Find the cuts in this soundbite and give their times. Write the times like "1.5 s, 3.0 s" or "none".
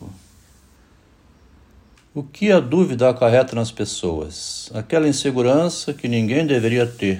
2.0 s

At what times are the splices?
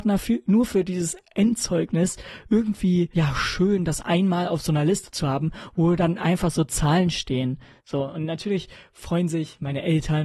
7.8 s

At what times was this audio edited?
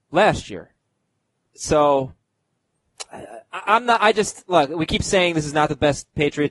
none

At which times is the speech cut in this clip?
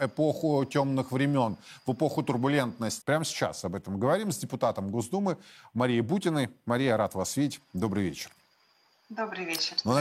3.0 s

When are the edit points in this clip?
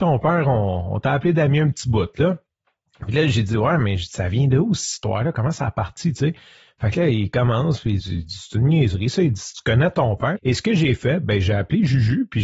8.0 s, 10.4 s

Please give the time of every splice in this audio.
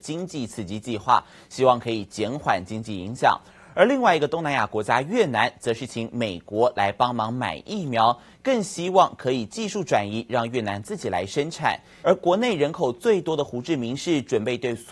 12.0 s

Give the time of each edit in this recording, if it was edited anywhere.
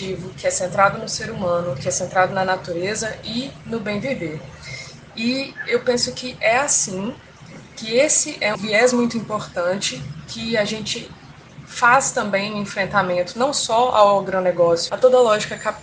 8.5 s, 14.9 s

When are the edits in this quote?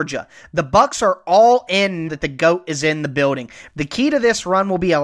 2.1 s, 3.7 s

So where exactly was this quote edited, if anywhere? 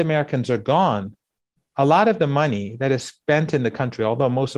none

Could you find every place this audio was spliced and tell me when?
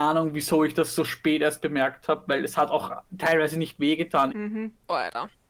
4.3 s

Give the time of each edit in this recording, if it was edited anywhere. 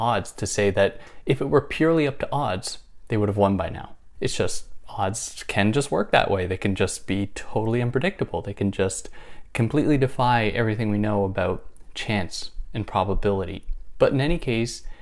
4.2 s

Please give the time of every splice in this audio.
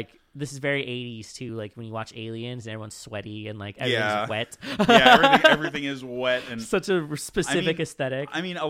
none

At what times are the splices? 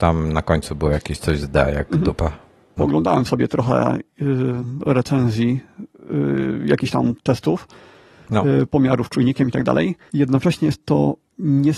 2.8 s, 10.1 s

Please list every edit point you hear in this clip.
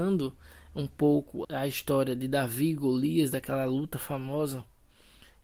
1.4 s

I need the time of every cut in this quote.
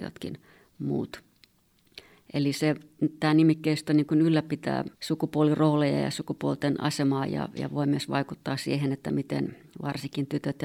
4.9 s

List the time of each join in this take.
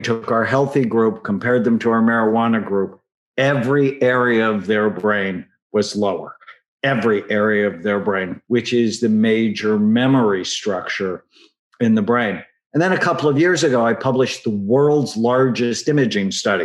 8.4 s

